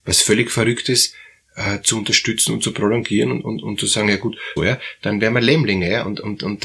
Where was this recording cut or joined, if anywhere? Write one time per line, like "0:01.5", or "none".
0:04.6